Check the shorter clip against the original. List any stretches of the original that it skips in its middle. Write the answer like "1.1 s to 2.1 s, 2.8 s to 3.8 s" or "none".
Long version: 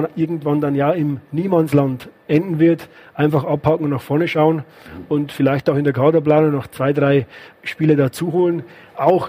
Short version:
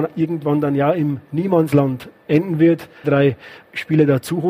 3.0 s to 6.9 s